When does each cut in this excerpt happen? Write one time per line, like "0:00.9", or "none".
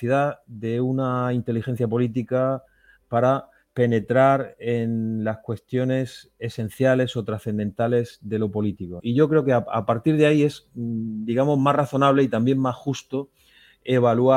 0:09.0